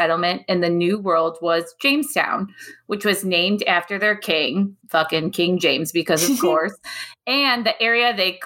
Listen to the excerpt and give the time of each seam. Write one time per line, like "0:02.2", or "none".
0:04.8